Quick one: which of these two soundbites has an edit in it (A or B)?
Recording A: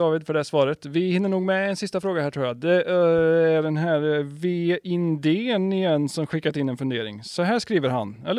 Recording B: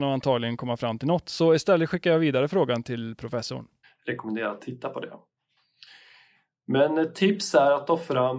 B